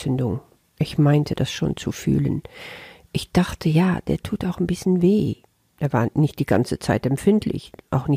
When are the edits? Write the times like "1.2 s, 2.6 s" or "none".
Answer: none